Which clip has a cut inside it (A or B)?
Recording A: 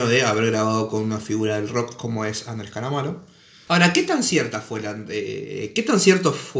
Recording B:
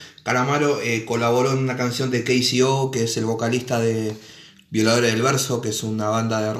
A